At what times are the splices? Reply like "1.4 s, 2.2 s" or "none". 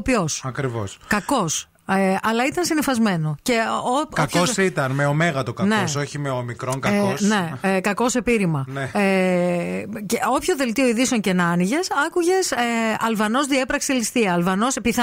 none